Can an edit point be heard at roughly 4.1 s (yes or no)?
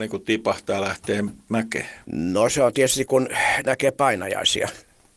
no